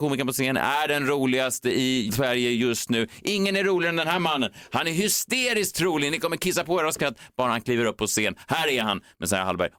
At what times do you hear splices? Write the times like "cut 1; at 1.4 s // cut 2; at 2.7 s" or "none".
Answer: none